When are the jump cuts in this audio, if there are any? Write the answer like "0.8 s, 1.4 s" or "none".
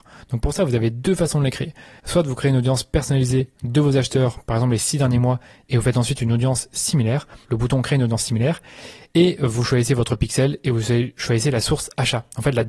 7.4 s